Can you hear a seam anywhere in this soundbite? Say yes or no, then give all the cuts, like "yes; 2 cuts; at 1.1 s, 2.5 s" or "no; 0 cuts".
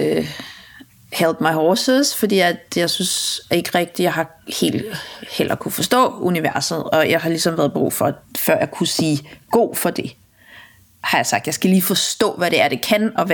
no; 0 cuts